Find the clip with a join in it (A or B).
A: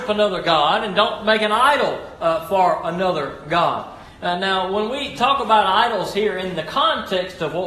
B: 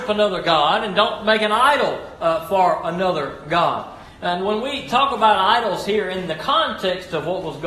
B